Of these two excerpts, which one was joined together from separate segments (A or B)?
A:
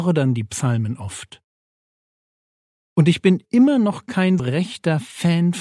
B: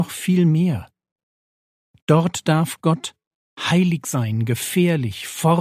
A